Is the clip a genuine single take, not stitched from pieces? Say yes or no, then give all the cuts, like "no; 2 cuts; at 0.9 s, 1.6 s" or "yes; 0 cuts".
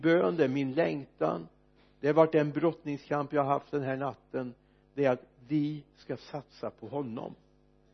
yes; 0 cuts